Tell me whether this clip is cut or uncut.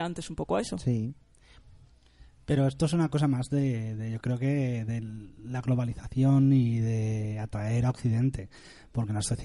uncut